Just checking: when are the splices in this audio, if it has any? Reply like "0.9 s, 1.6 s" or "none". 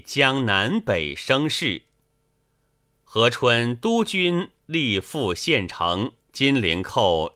6.2 s